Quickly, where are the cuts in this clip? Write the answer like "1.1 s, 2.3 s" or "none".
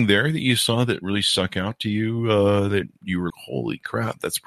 3.3 s